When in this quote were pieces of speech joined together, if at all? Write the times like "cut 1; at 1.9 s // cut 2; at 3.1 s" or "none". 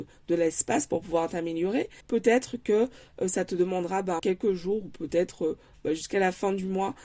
cut 1; at 2.0 s // cut 2; at 4.2 s